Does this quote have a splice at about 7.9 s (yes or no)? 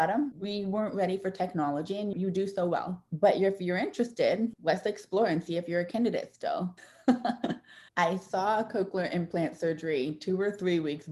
yes